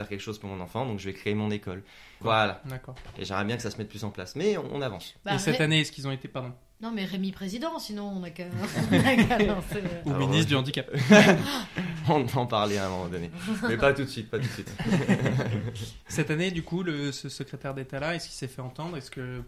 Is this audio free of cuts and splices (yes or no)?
no